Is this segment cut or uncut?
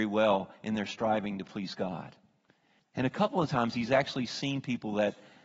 cut